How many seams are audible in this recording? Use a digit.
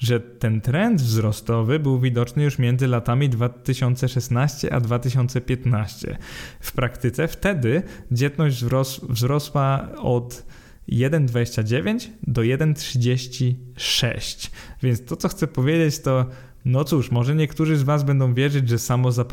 0